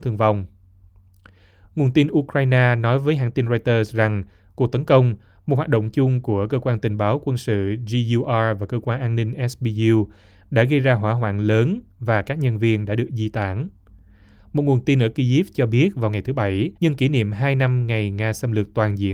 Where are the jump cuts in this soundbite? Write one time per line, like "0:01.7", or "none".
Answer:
0:14.4
0:16.8